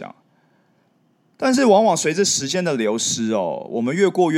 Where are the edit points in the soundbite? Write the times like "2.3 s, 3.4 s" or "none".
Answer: none